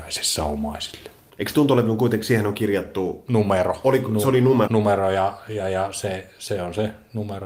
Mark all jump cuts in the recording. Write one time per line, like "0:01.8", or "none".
0:01.3
0:04.7